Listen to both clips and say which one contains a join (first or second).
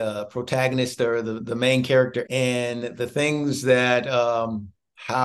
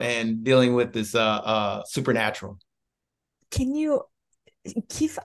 first